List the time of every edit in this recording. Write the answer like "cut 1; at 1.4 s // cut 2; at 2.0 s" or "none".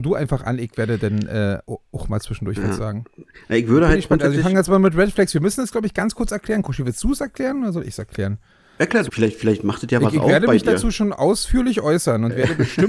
cut 1; at 9.1 s